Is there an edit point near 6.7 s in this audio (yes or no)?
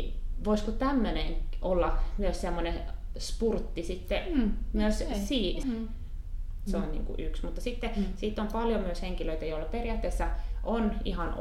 yes